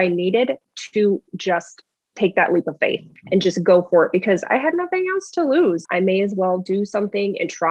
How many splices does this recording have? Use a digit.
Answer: 1